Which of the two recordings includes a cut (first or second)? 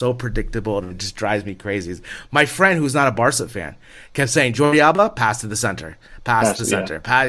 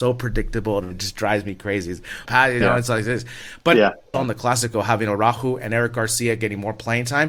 second